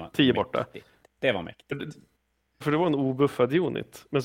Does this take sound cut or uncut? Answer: uncut